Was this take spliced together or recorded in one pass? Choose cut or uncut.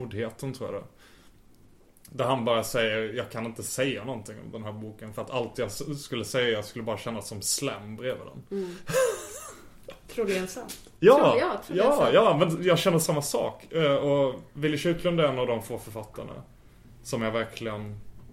uncut